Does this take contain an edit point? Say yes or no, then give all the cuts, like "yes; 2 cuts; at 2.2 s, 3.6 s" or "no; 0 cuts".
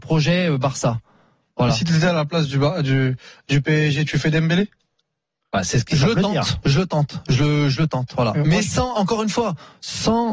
no; 0 cuts